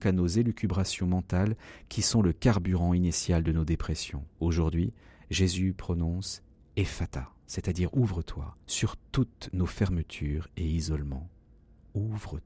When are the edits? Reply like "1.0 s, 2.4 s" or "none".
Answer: 4.3 s, 8.6 s